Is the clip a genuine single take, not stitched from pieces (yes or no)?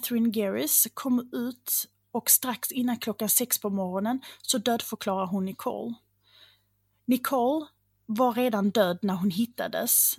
yes